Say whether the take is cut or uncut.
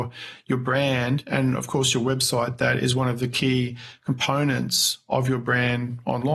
uncut